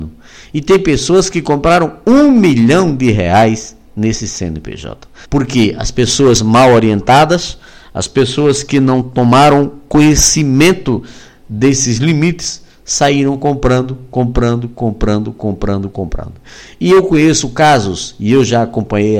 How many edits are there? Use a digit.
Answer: 1